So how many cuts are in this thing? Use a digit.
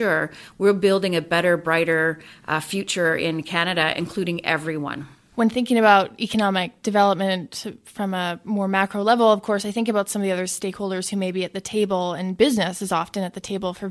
0